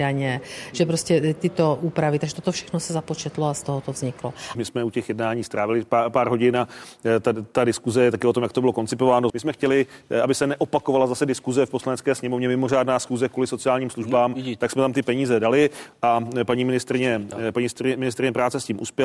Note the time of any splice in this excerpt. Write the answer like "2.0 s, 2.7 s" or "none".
4.5 s, 9.3 s